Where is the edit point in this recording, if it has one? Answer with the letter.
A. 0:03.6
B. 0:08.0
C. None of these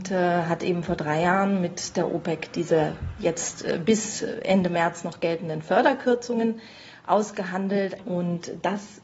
B